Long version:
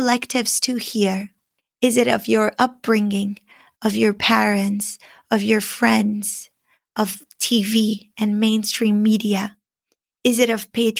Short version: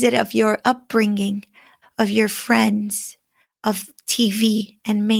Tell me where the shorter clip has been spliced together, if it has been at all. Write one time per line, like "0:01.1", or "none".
0:01.8